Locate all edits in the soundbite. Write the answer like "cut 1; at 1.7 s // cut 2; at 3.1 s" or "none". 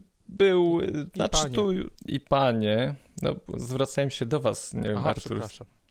cut 1; at 2.0 s